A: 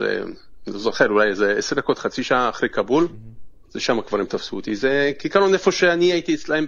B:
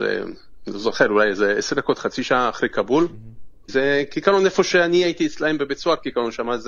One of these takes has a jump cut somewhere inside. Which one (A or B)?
B